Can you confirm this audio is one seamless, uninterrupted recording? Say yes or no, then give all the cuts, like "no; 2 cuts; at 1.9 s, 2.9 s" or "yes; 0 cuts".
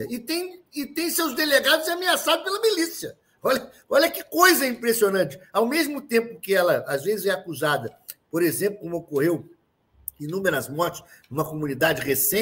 yes; 0 cuts